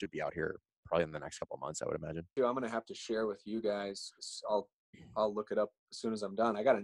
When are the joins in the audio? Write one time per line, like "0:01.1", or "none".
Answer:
0:02.4